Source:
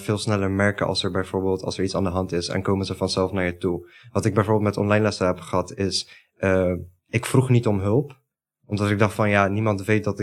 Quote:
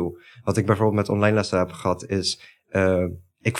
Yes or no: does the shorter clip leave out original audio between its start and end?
no